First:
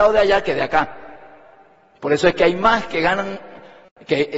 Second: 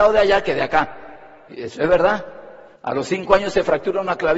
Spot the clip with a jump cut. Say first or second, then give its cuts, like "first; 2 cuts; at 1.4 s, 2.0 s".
second; 2 cuts; at 1.5 s, 2.8 s